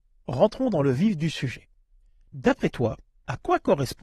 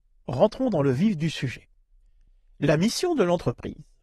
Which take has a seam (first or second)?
first